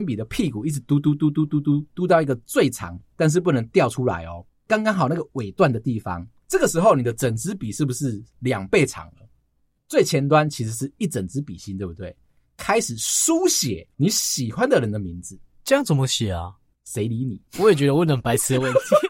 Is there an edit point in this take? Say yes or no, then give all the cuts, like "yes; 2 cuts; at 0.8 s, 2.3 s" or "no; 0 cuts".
yes; 1 cut; at 17.5 s